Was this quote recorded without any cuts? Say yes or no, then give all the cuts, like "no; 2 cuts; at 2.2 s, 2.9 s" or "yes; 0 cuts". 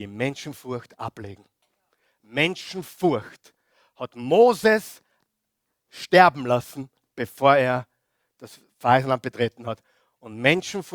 yes; 0 cuts